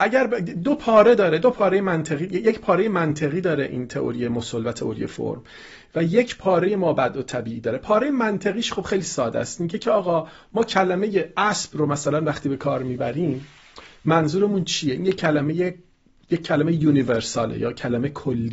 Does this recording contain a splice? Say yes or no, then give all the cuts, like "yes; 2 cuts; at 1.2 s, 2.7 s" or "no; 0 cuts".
no; 0 cuts